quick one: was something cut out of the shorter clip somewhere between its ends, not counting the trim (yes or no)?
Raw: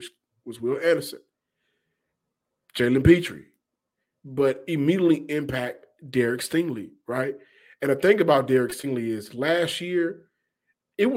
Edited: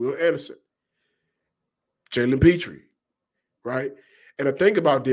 yes